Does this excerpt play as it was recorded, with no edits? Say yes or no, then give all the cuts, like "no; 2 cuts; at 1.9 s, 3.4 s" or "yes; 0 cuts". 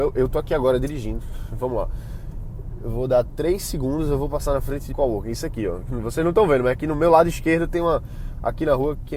no; 1 cut; at 4.9 s